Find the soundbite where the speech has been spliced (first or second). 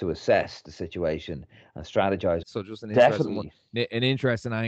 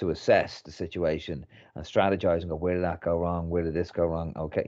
first